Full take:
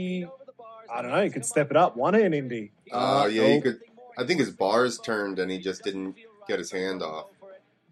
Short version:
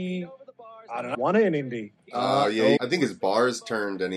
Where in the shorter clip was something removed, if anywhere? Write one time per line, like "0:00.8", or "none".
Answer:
0:01.1
0:02.8